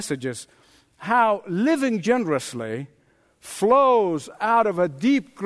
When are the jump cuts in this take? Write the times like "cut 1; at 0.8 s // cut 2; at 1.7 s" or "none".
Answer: none